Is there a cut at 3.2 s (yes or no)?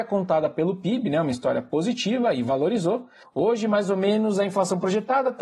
yes